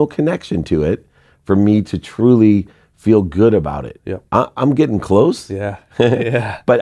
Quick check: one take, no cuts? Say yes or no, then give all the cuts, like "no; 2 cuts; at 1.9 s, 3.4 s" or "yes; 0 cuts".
yes; 0 cuts